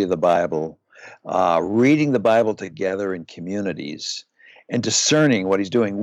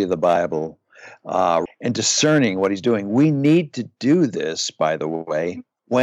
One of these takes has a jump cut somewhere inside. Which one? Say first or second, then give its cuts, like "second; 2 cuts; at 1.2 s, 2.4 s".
second; 1 cut; at 1.7 s